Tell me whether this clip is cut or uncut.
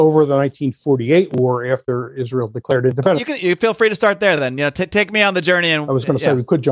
uncut